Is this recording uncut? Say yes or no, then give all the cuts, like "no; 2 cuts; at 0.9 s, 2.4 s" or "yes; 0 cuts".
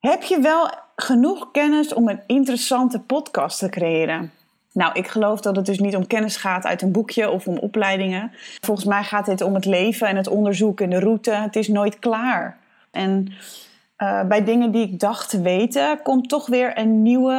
no; 1 cut; at 12.9 s